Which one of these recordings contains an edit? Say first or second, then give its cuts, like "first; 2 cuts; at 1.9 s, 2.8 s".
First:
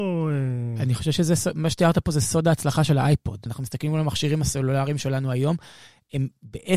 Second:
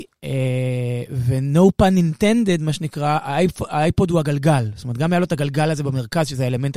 first; 1 cut; at 3.5 s